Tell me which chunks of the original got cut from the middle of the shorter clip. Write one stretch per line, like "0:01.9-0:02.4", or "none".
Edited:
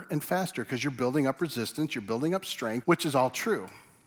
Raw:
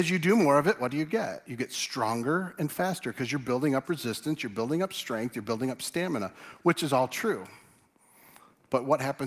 0:05.3-0:06.6